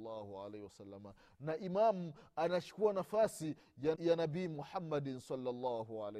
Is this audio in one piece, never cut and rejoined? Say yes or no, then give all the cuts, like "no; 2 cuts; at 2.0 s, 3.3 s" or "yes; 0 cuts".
no; 1 cut; at 4.0 s